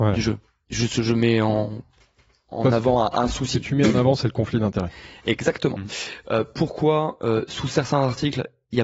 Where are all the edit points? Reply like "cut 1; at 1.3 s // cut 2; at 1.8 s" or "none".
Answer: none